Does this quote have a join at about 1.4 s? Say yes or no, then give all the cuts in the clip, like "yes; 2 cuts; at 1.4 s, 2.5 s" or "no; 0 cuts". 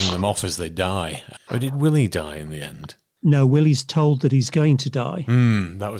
yes; 1 cut; at 1.4 s